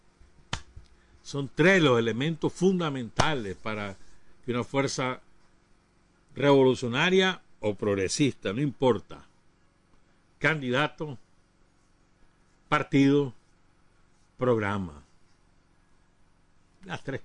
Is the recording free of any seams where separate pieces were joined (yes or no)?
yes